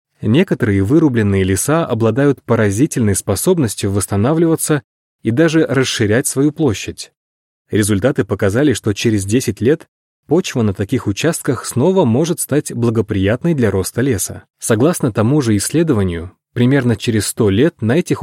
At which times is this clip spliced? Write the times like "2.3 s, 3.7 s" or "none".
7.5 s, 14.5 s